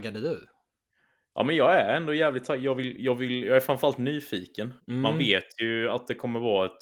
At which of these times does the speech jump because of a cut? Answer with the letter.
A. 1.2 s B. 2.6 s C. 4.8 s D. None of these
C